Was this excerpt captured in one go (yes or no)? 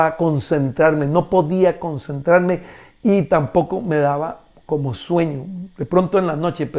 yes